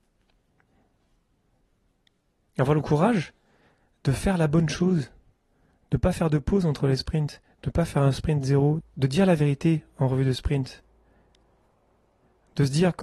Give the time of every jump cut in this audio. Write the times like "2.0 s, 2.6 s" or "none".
8.8 s